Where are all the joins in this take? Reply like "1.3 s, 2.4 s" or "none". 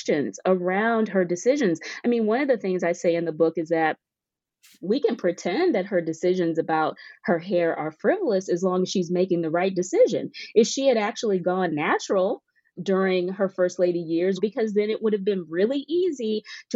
12.8 s, 14.4 s

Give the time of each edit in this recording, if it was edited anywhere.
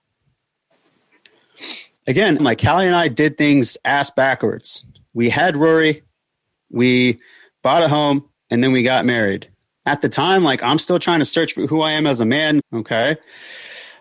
2.4 s, 9.8 s, 12.6 s

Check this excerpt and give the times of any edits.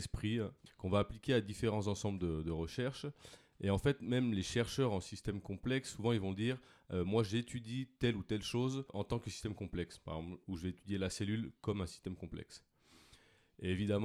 10.4 s

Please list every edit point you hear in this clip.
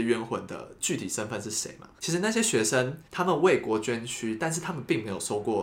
2.0 s, 3.1 s

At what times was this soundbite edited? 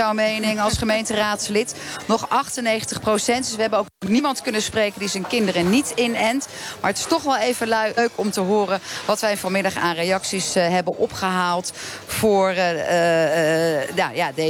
none

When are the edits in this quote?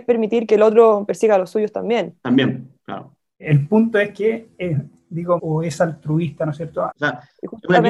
5.4 s, 6.9 s

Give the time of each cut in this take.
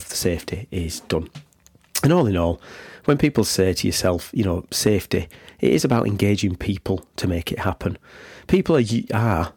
none

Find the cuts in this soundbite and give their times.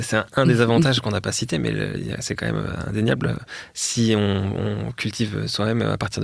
none

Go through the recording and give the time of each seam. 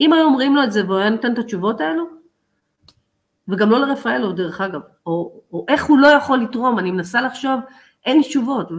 5.0 s

